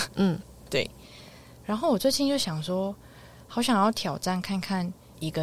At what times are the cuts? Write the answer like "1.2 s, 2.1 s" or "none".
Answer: none